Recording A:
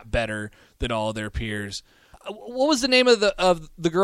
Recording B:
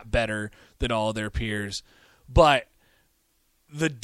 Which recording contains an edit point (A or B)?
A